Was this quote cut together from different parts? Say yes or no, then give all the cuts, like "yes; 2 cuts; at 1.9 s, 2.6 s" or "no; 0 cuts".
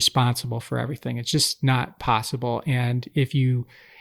no; 0 cuts